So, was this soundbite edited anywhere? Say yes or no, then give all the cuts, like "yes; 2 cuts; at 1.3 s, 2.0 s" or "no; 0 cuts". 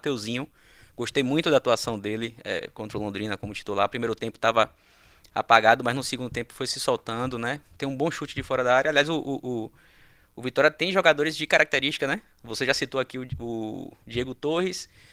no; 0 cuts